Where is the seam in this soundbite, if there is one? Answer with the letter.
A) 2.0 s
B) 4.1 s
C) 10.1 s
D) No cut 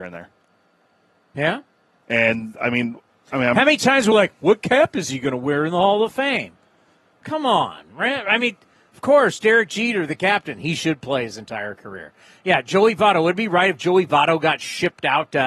D